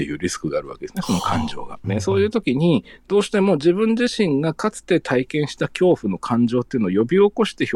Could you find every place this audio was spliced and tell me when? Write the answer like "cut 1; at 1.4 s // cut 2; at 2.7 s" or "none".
cut 1; at 1.8 s